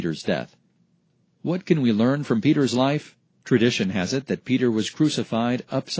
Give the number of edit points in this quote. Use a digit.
1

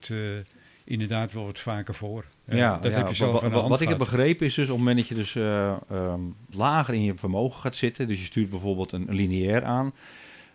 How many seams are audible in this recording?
1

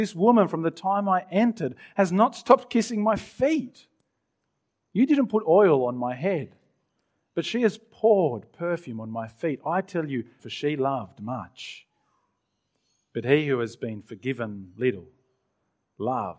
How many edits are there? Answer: 1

